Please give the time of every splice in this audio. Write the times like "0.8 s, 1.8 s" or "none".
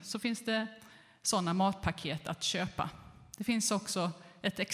none